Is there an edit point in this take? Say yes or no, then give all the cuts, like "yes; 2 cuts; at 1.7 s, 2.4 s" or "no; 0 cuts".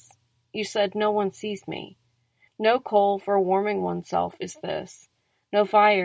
yes; 1 cut; at 2.5 s